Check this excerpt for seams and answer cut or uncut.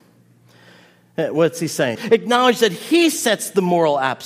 cut